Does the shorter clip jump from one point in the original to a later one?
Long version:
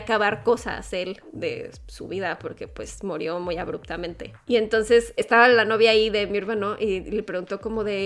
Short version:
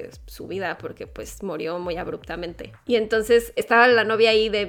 no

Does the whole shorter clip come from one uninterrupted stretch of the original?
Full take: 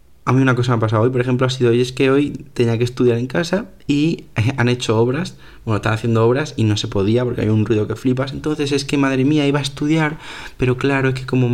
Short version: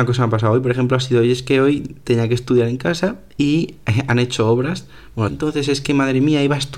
no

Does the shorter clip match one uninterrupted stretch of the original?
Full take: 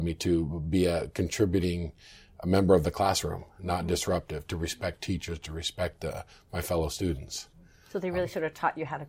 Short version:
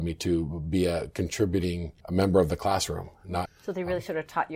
no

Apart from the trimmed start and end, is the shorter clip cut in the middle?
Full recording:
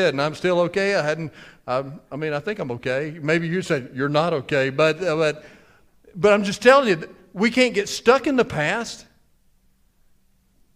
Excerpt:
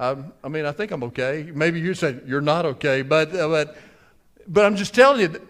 no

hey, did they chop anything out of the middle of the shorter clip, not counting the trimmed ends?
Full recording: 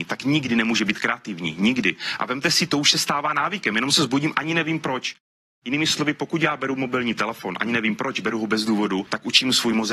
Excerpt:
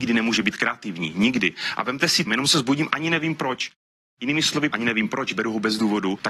yes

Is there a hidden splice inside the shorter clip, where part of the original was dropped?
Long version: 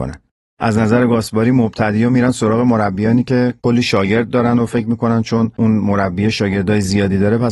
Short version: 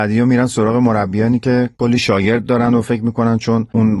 no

